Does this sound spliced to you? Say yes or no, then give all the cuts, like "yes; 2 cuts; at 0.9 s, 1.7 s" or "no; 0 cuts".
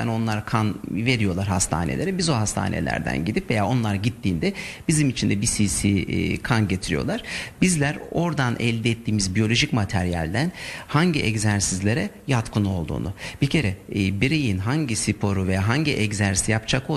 no; 0 cuts